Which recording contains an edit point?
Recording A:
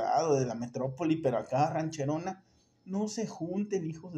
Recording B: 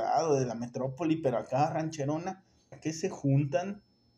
B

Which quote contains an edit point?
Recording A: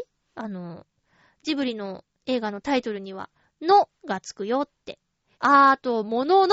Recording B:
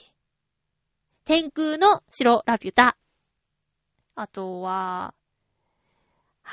A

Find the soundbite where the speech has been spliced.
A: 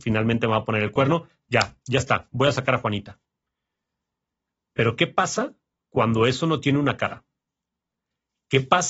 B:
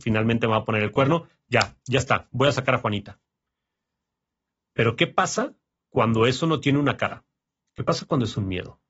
B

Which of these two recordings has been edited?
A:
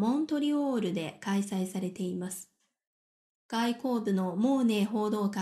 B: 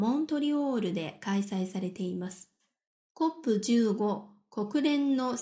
B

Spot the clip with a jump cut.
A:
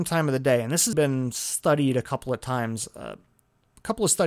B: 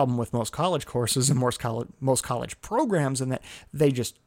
A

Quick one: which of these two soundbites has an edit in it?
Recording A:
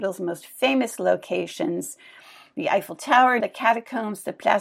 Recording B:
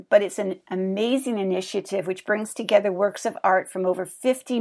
A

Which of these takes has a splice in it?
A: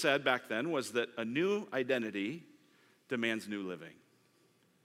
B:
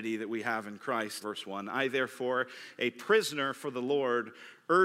B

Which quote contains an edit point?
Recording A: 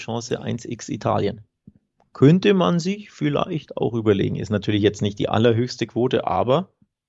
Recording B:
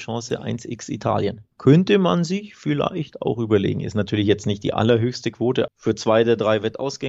B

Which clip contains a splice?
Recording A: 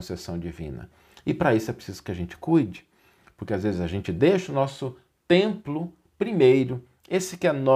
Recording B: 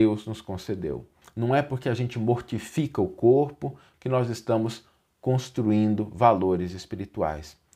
B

